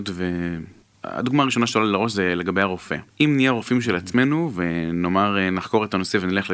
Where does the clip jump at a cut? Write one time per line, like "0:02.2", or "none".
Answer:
0:00.9
0:03.1